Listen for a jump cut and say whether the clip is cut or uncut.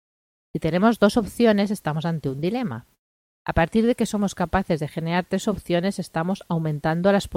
uncut